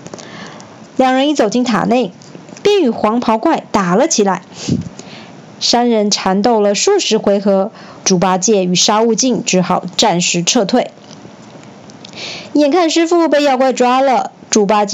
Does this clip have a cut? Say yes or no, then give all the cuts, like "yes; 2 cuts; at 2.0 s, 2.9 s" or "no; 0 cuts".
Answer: yes; 2 cuts; at 2.6 s, 8.0 s